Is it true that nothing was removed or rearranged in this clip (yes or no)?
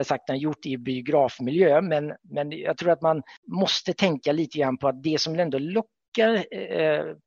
no